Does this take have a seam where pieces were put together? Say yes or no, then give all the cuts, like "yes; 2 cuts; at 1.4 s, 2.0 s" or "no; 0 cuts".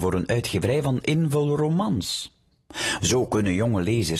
yes; 1 cut; at 3.0 s